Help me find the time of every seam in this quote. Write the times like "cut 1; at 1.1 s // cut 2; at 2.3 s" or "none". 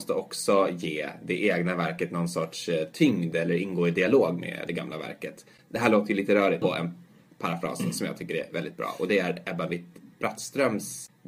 cut 1; at 6.6 s